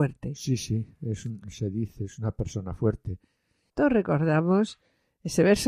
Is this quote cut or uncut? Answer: cut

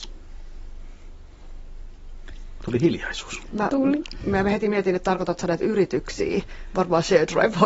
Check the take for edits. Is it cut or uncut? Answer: uncut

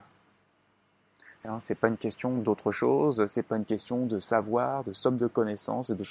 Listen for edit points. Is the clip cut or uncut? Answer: cut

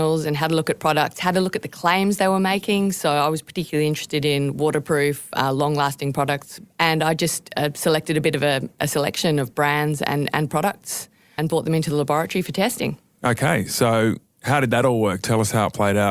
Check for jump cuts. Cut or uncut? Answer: cut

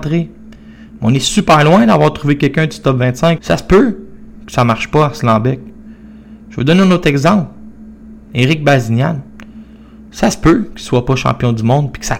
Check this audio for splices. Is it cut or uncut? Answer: cut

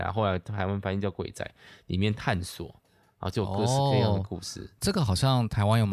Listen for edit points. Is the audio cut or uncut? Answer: uncut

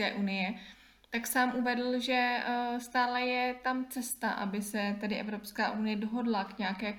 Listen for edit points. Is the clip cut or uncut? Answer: uncut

